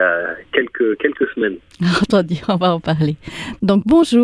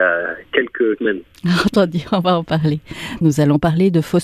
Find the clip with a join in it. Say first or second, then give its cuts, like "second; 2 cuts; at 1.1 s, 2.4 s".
second; 2 cuts; at 1.0 s, 3.2 s